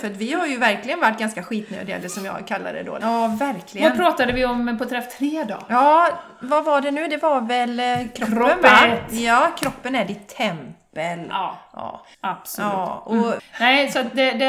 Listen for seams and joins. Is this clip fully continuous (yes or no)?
no